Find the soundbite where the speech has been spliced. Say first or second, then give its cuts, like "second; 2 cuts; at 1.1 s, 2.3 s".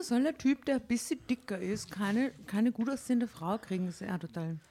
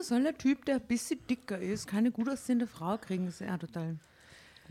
second; 1 cut; at 1.9 s